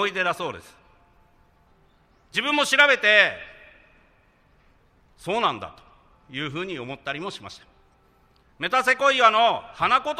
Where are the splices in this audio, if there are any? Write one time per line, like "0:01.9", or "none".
0:08.5